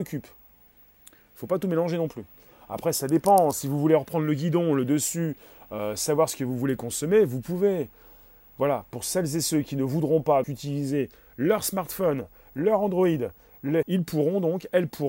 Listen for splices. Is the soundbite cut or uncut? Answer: cut